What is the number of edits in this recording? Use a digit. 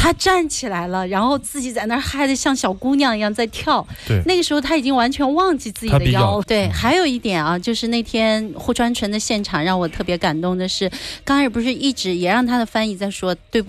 1